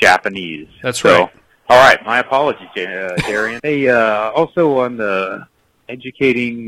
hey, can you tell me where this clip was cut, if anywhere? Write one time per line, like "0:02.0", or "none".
0:03.6